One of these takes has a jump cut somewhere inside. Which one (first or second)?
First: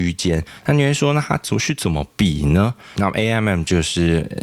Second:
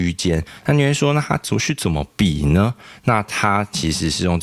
first